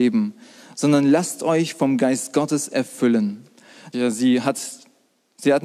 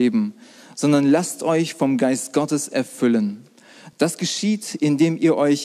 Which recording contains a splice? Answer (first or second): first